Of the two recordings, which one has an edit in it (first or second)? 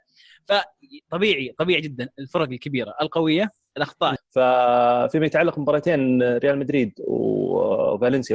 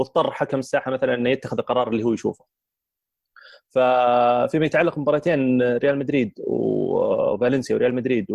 first